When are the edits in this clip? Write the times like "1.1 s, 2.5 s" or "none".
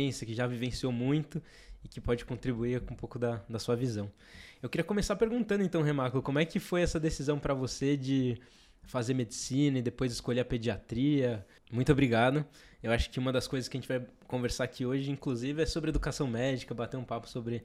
11.6 s